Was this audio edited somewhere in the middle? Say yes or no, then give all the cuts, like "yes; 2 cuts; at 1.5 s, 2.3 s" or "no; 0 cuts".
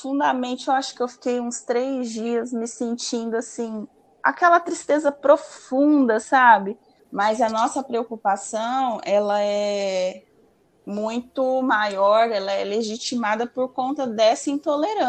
yes; 1 cut; at 7.0 s